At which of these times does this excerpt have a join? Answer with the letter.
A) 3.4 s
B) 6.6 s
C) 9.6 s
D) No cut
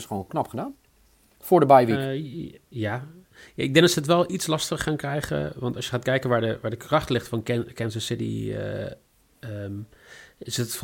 D